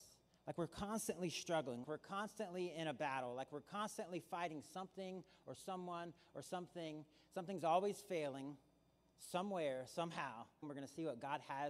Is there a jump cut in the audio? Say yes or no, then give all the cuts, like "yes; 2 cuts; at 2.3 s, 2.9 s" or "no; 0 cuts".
yes; 2 cuts; at 1.8 s, 10.6 s